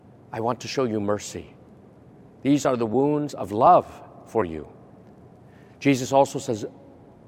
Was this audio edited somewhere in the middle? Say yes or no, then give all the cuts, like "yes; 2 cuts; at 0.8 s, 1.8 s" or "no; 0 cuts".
no; 0 cuts